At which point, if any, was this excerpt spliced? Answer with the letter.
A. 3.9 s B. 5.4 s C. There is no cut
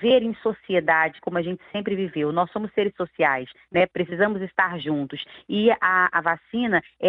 A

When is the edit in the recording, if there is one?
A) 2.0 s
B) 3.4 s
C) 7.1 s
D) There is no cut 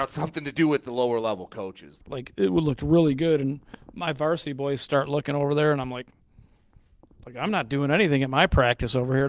A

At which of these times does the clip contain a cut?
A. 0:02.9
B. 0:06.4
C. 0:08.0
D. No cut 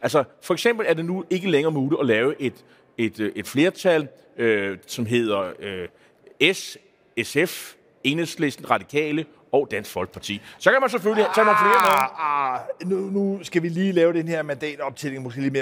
D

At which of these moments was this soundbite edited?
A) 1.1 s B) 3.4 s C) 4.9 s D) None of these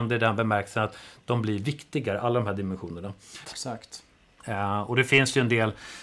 B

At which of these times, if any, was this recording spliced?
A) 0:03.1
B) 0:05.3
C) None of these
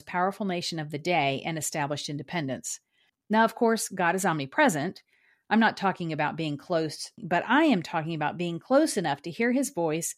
A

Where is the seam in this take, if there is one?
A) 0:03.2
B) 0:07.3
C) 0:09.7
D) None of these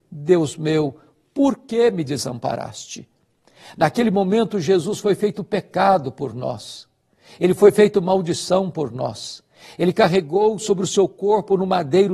D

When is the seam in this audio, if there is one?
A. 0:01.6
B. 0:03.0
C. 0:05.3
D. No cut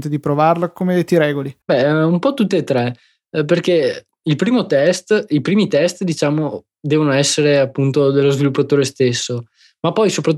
A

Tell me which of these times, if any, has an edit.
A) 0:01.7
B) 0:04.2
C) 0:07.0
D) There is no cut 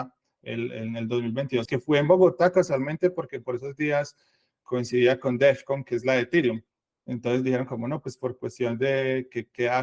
A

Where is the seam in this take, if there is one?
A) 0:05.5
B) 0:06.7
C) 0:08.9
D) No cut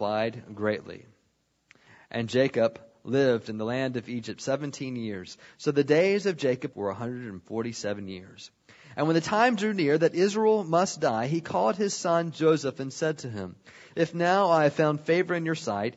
B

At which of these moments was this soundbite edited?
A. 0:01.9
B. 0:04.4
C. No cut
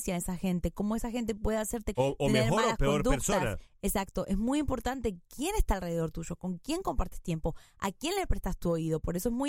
A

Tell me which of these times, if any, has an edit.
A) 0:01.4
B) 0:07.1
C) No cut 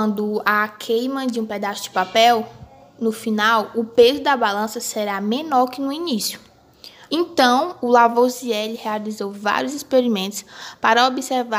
B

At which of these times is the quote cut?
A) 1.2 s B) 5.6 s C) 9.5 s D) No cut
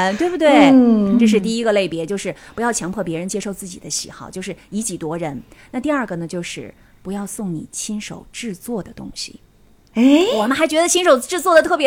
D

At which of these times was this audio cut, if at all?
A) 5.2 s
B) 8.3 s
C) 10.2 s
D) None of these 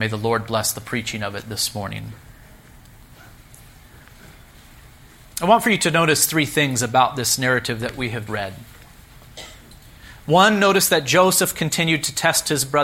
B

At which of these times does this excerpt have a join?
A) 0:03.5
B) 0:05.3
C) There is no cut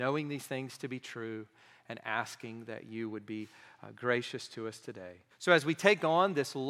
B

